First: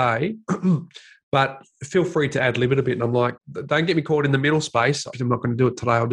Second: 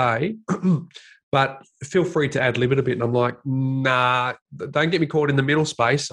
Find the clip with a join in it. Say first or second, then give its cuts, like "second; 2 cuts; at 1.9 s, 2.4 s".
first; 2 cuts; at 3.4 s, 5.1 s